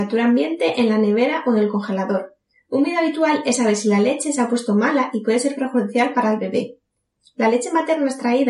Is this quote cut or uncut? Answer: uncut